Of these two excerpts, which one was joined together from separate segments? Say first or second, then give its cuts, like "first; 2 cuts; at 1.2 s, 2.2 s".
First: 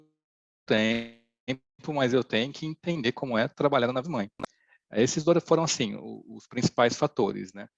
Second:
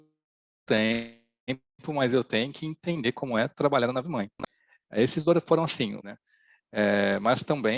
second; 1 cut; at 6.0 s